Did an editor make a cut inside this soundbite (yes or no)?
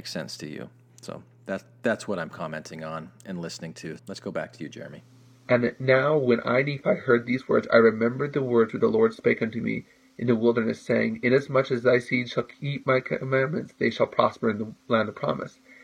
yes